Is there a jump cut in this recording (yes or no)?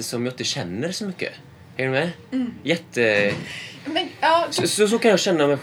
no